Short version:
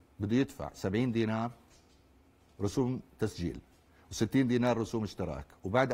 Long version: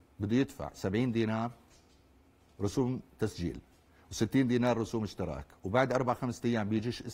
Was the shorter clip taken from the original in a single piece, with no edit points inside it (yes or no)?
yes